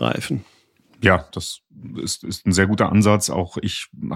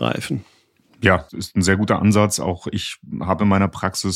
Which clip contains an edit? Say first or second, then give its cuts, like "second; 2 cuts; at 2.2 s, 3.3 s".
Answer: second; 1 cut; at 1.3 s